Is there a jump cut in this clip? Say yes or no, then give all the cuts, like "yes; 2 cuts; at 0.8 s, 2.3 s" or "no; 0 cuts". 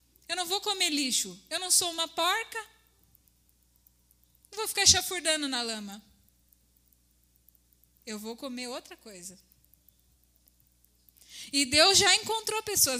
no; 0 cuts